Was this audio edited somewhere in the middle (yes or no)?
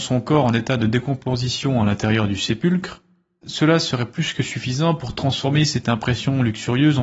no